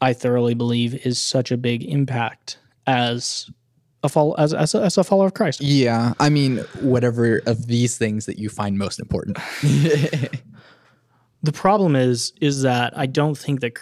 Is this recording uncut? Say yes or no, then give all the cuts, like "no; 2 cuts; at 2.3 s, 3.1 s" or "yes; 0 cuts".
no; 1 cut; at 5.6 s